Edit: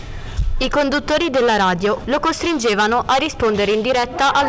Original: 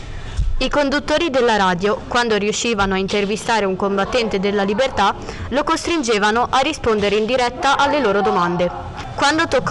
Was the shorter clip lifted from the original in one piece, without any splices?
no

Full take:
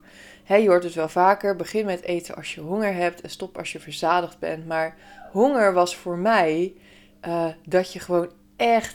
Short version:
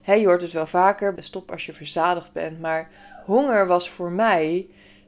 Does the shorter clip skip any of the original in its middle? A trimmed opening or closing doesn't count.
yes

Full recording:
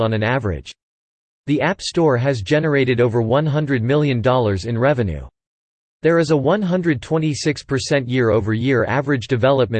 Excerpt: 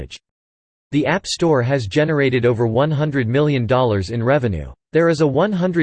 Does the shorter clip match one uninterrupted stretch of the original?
no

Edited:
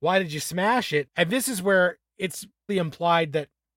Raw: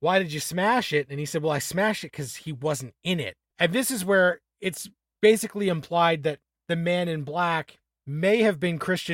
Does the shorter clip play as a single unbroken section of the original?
no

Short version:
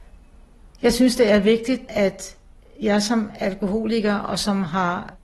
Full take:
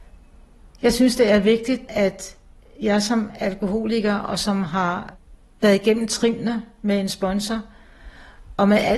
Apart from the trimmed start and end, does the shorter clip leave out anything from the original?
no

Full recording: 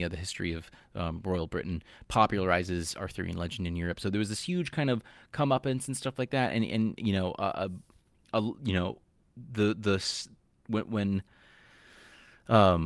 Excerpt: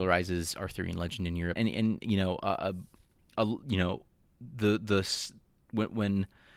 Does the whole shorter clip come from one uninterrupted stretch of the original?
no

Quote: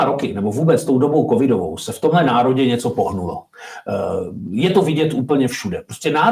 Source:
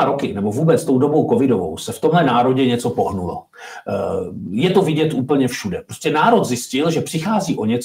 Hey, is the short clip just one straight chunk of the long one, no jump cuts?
yes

